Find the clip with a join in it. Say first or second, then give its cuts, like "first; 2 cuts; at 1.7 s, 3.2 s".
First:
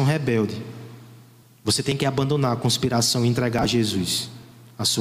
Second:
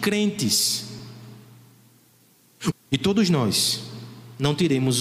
second; 1 cut; at 2.7 s